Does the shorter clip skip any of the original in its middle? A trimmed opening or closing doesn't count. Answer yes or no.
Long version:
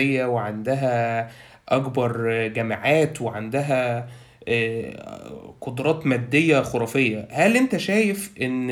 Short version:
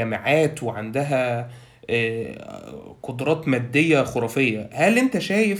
no